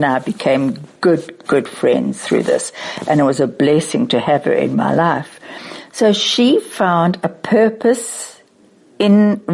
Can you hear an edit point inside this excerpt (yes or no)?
no